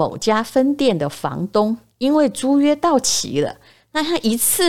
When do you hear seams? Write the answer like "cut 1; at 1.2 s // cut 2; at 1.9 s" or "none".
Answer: none